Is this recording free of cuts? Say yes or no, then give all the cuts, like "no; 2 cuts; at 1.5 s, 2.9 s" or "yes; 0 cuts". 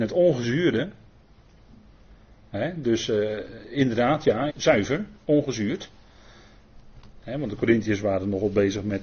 no; 1 cut; at 4.5 s